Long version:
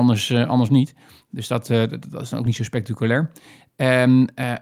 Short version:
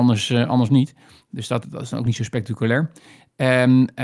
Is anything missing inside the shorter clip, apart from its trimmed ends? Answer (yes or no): yes